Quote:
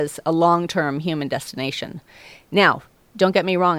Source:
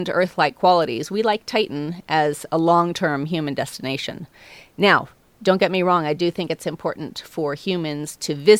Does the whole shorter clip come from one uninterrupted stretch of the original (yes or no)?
yes